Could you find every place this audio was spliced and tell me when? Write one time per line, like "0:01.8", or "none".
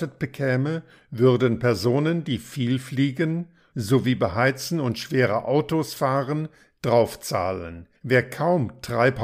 0:03.7
0:08.0